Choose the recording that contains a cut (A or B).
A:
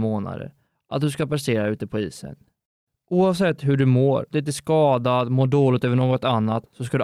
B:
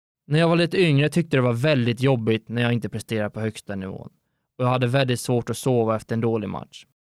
A